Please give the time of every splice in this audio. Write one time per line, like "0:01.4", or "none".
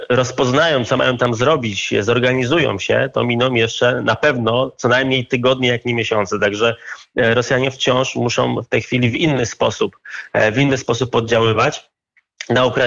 none